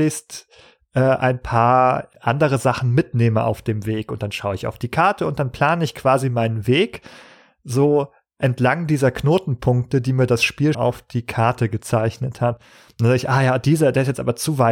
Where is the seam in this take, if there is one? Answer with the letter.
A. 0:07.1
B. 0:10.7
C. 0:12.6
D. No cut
B